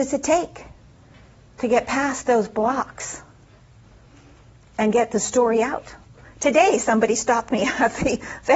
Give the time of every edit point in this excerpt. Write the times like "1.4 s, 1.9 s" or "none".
none